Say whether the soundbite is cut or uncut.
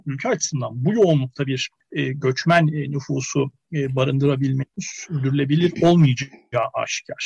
uncut